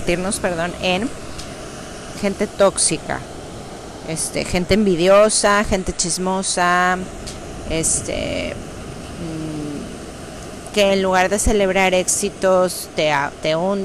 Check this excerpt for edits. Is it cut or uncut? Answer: cut